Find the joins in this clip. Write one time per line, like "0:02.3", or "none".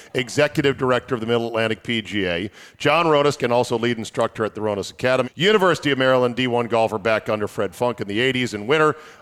0:03.4
0:05.2